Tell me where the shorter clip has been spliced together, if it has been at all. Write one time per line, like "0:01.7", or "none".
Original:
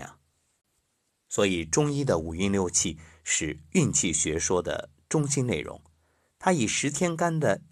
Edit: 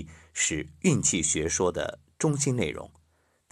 none